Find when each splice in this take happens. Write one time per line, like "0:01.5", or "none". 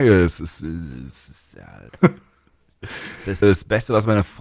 0:01.9
0:03.4